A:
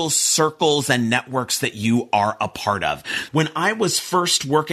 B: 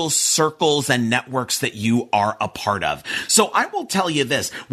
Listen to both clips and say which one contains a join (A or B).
A